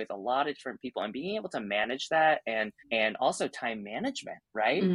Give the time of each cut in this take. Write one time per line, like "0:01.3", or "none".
0:02.8